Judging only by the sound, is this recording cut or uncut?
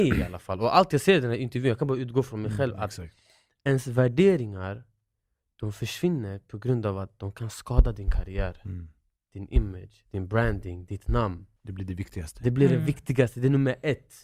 cut